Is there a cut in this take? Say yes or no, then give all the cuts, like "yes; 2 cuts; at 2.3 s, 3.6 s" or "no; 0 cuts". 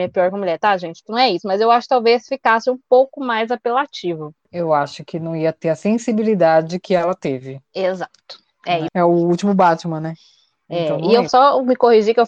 yes; 2 cuts; at 8.9 s, 11.3 s